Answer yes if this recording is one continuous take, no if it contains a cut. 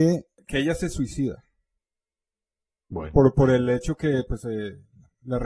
yes